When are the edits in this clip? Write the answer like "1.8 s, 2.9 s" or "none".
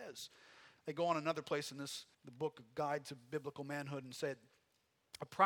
2.1 s